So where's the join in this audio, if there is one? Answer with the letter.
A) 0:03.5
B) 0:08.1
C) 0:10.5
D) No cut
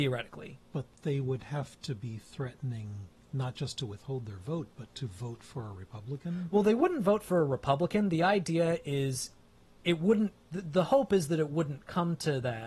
C